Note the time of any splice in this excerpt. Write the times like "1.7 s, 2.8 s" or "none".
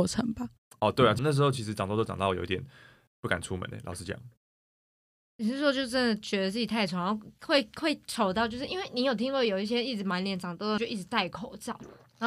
1.2 s, 10.8 s